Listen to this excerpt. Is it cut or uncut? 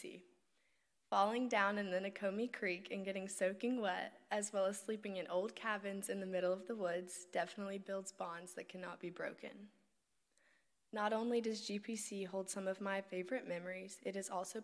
uncut